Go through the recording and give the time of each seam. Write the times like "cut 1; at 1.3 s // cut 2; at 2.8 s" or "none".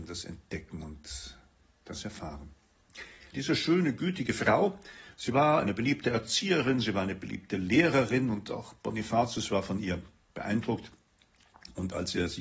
cut 1; at 3.3 s